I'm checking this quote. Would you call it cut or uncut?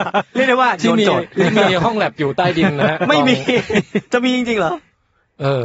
uncut